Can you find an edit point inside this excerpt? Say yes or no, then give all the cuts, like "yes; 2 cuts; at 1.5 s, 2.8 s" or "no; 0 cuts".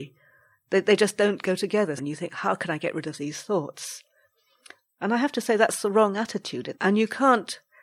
yes; 2 cuts; at 2.0 s, 6.7 s